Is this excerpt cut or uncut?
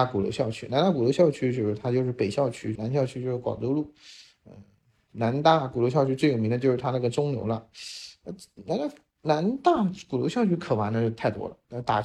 cut